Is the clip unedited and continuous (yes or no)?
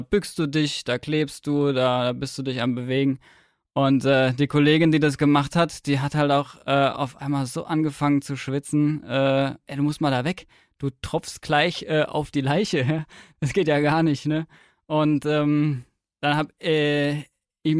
no